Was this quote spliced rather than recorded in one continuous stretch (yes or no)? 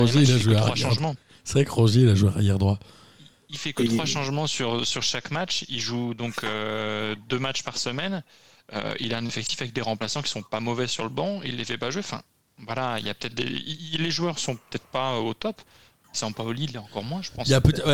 no